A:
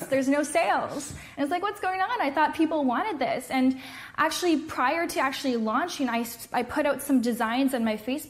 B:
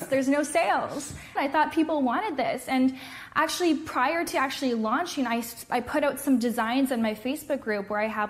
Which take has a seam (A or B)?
B